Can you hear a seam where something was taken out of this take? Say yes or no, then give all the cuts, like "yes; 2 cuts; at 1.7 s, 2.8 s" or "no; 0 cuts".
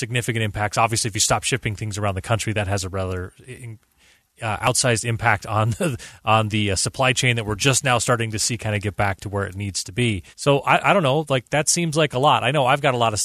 yes; 1 cut; at 10.3 s